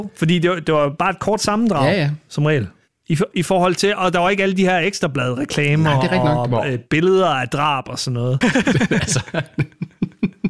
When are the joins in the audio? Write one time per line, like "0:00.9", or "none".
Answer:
0:08.4